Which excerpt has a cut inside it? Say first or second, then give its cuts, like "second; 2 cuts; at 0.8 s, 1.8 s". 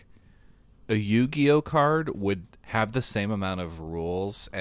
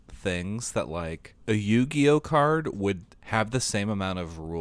second; 1 cut; at 1.4 s